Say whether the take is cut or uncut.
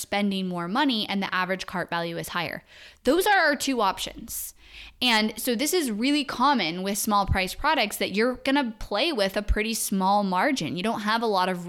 uncut